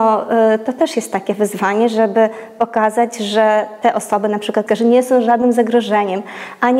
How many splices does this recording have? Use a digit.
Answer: 1